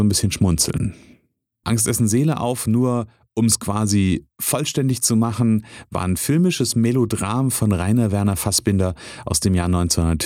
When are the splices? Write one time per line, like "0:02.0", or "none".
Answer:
0:01.6